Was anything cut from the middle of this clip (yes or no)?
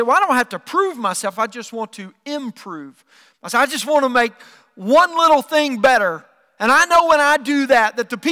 no